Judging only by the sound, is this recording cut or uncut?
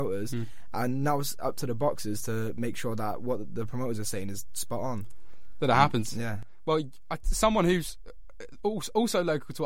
uncut